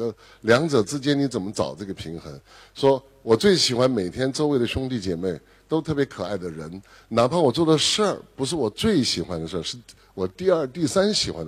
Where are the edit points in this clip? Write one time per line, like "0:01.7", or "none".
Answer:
none